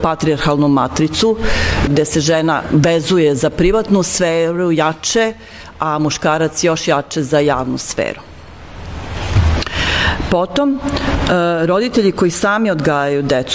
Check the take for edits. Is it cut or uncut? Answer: cut